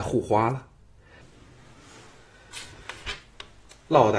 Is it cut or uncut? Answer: cut